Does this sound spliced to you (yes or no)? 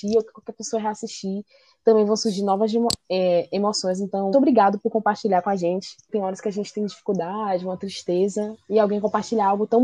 yes